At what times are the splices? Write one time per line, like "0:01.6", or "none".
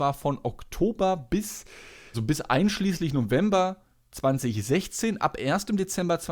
0:02.1